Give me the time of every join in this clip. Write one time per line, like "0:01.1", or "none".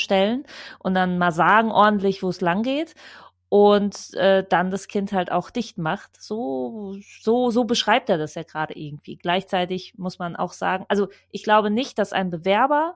none